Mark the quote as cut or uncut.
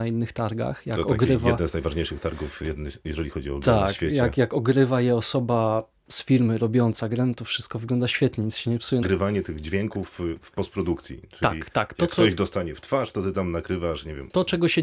cut